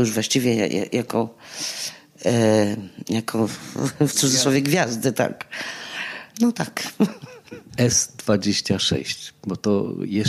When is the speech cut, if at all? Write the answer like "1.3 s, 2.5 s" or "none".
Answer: 7.7 s

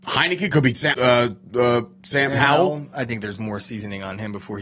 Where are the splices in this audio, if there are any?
0.9 s

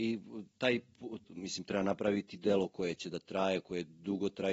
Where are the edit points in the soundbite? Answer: 1.2 s

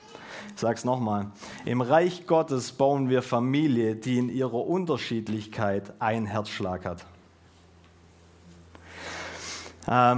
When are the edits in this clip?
none

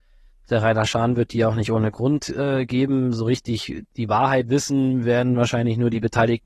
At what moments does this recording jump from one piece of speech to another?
none

